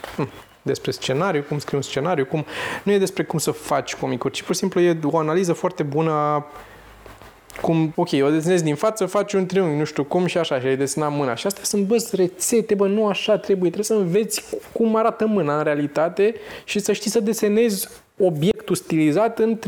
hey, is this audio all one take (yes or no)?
no